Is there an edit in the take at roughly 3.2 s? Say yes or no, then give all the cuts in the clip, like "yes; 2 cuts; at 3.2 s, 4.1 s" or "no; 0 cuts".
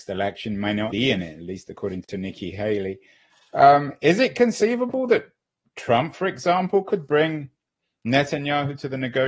no; 1 cut; at 0.9 s